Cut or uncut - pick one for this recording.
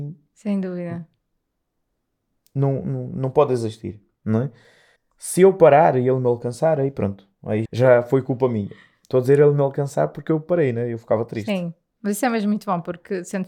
cut